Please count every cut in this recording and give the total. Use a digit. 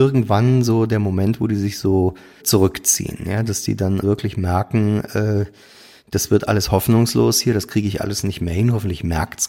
2